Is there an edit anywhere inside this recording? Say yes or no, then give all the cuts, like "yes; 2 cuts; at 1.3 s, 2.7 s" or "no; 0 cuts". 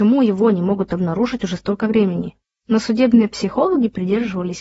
no; 0 cuts